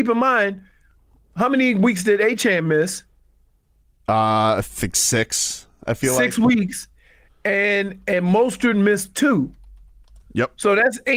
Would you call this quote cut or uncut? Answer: uncut